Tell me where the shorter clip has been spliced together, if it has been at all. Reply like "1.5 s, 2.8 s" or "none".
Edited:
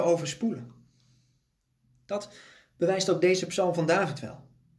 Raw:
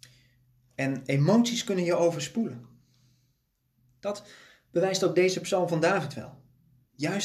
none